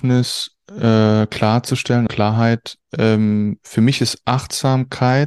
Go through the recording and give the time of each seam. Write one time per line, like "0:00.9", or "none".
0:02.1